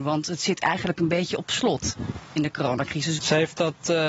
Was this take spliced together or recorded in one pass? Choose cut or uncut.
cut